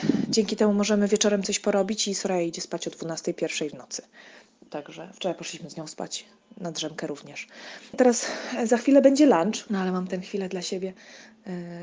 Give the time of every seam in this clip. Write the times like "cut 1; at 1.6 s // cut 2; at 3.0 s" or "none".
cut 1; at 7.9 s // cut 2; at 9.7 s